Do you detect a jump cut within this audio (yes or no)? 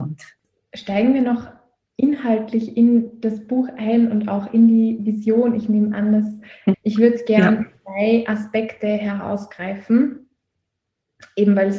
yes